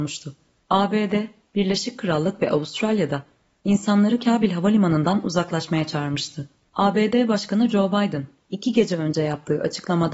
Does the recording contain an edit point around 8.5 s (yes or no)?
no